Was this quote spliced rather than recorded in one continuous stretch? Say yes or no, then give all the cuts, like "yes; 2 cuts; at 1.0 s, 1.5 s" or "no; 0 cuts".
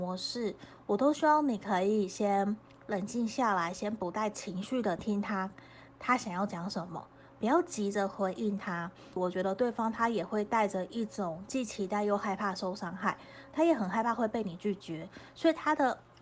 yes; 2 cuts; at 5.0 s, 9.2 s